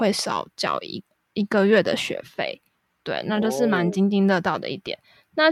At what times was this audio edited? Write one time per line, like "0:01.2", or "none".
none